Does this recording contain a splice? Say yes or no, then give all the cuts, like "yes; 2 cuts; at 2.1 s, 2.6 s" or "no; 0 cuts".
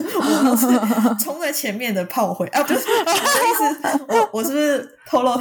yes; 1 cut; at 2.6 s